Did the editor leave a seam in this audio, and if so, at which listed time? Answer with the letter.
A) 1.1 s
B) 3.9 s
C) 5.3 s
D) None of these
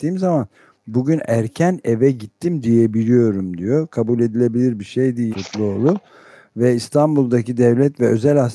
C